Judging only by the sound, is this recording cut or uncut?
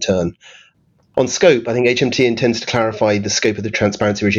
uncut